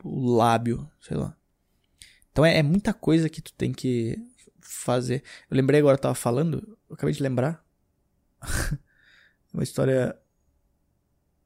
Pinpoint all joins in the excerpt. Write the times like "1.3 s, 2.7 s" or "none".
none